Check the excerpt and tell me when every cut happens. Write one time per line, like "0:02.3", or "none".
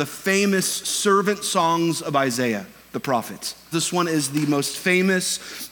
0:03.7